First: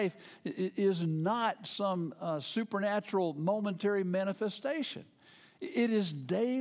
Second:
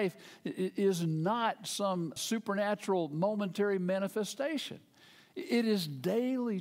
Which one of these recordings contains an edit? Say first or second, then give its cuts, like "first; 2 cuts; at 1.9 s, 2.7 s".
second; 1 cut; at 2.2 s